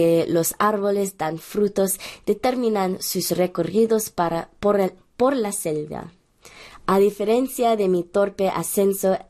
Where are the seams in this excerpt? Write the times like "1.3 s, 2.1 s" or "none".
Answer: 6.8 s